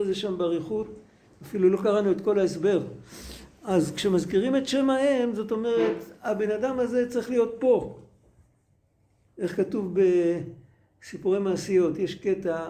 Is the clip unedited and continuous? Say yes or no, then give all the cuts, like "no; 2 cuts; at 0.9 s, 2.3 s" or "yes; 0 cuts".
yes; 0 cuts